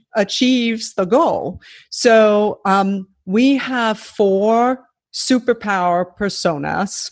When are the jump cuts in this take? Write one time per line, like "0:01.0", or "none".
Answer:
none